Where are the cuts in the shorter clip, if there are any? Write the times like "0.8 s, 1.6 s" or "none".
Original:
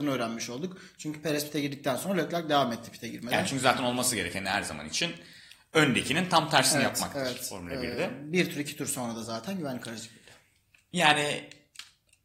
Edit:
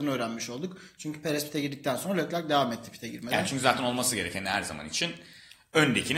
none